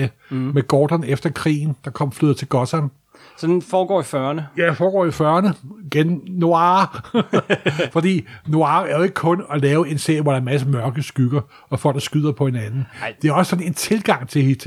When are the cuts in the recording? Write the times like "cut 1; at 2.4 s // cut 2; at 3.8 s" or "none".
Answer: none